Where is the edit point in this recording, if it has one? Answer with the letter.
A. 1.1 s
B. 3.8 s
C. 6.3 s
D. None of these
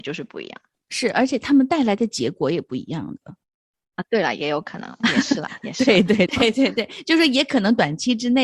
C